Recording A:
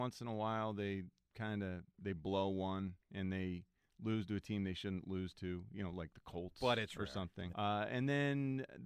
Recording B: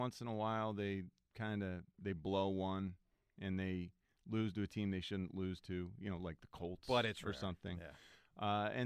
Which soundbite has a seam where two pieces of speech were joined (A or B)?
A